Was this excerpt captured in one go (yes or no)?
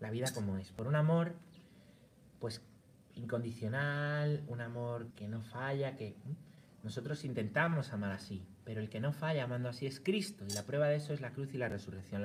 no